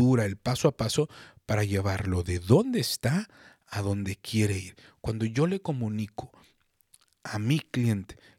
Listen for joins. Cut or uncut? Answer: uncut